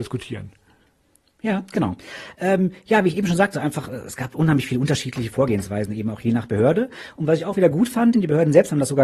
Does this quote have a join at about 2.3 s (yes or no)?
no